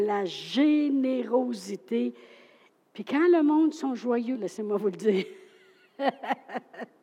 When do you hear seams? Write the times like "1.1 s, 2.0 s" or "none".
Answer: 2.7 s, 4.3 s